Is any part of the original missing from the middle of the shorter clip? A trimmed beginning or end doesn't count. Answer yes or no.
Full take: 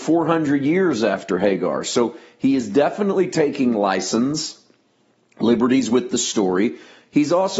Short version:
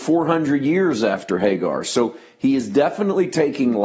no